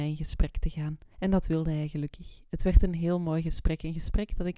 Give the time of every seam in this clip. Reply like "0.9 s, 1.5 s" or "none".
1.1 s